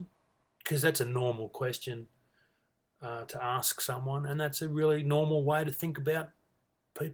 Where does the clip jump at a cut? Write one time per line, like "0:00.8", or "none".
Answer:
none